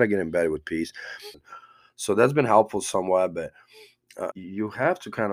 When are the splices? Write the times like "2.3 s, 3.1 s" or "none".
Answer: 1.3 s, 4.3 s